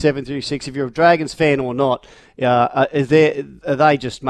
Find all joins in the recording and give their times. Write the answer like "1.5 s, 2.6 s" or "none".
none